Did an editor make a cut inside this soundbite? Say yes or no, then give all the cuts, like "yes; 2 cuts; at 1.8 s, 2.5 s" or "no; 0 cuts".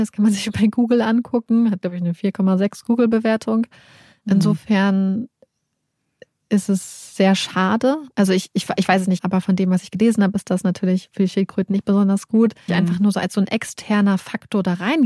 yes; 2 cuts; at 9.2 s, 12.7 s